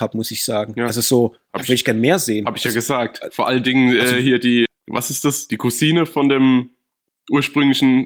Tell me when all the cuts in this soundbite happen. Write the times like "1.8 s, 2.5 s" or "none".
4.7 s